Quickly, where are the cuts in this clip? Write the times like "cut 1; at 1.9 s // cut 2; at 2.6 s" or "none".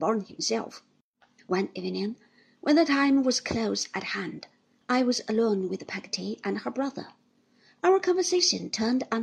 cut 1; at 1.4 s